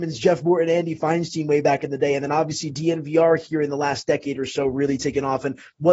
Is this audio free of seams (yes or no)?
yes